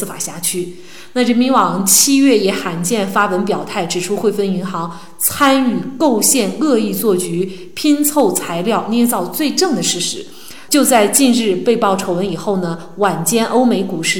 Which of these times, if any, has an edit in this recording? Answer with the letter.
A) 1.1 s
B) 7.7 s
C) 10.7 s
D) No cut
C